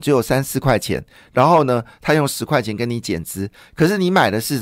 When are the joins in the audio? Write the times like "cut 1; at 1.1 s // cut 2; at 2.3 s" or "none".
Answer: none